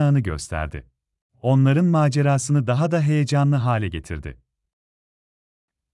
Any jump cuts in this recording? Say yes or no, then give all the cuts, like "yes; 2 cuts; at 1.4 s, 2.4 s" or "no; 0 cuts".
yes; 1 cut; at 1.3 s